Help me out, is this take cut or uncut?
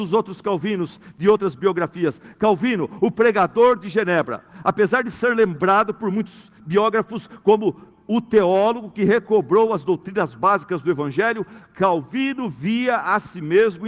uncut